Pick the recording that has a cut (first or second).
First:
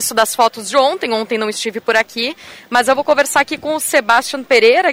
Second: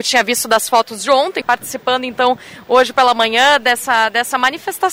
second